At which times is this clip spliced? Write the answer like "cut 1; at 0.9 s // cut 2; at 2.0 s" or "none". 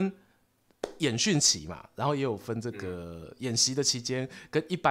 none